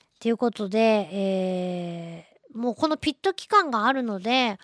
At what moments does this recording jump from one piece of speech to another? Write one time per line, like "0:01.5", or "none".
none